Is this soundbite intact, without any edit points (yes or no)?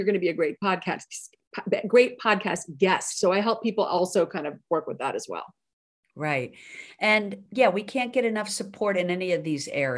no